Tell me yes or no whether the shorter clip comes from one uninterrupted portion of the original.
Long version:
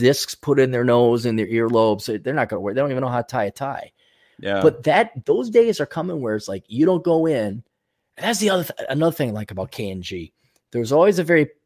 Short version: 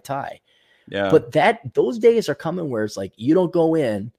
yes